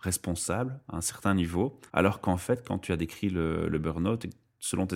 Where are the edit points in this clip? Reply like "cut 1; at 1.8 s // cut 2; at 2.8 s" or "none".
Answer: cut 1; at 1.9 s